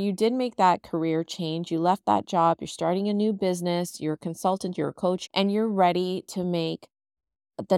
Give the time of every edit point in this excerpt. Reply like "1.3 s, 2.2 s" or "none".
5.3 s